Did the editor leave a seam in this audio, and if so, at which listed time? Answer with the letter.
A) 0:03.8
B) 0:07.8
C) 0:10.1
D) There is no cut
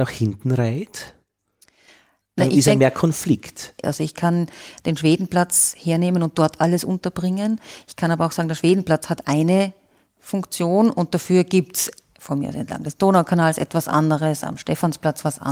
A